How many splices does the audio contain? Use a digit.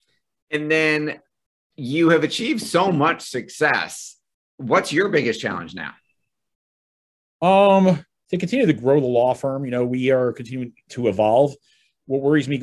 0